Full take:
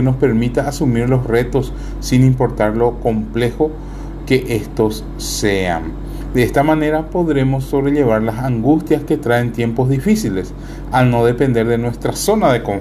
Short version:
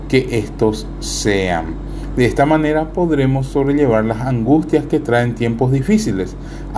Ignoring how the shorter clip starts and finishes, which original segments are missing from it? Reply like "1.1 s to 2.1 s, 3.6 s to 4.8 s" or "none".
none